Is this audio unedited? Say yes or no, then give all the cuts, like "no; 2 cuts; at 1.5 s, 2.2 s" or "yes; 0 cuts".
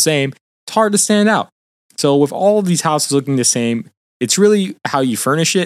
yes; 0 cuts